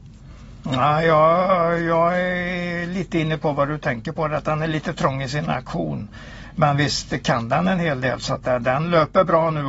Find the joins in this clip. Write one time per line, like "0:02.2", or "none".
none

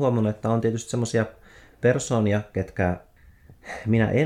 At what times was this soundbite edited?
none

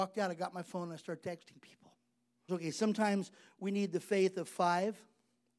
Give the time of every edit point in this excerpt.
0:02.5

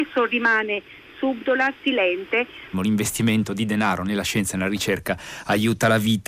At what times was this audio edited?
0:02.7

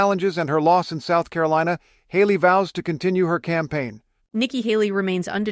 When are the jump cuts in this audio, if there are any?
0:04.2

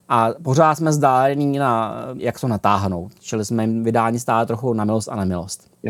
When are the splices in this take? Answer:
0:02.2

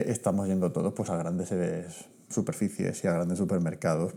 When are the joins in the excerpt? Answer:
none

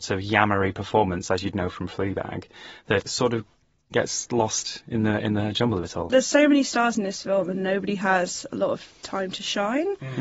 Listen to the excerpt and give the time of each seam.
0:03.1

